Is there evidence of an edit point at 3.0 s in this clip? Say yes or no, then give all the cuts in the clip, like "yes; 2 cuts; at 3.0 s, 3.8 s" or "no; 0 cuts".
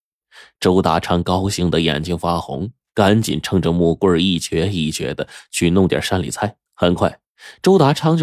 no; 1 cut; at 6.7 s